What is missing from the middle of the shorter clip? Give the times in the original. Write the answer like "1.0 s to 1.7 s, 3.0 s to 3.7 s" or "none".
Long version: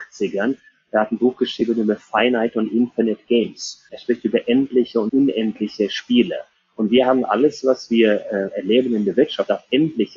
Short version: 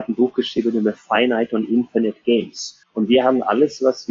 3.9 s to 6.7 s